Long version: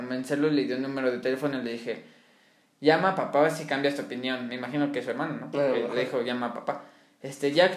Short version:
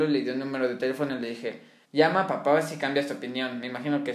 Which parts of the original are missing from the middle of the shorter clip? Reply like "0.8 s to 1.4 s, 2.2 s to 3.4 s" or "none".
2.3 s to 2.7 s